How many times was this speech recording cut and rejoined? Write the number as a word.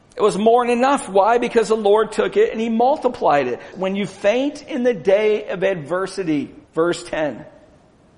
two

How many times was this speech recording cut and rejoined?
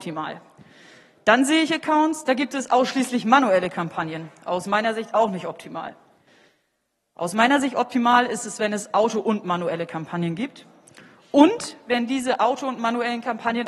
zero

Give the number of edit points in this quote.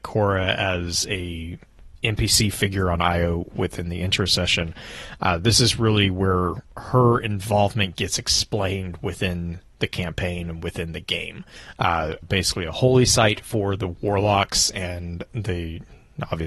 one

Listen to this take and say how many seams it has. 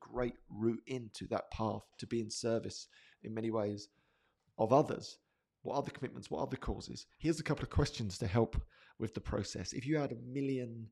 one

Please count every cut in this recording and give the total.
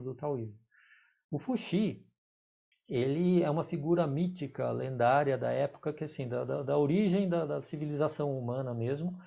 zero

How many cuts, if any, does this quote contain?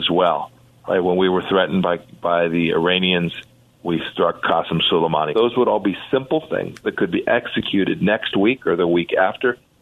one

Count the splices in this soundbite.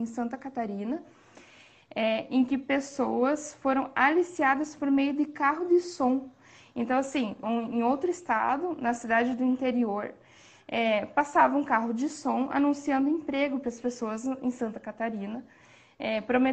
one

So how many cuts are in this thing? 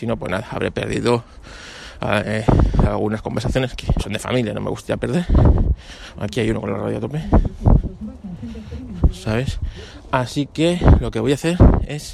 two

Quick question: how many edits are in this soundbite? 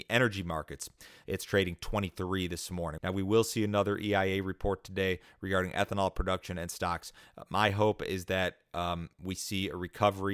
two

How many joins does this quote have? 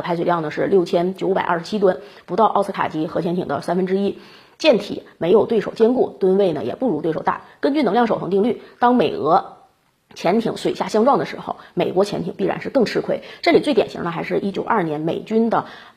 one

